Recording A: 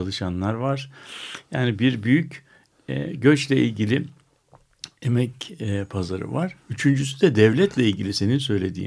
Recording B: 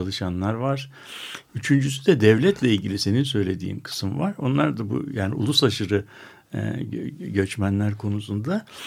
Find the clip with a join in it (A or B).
B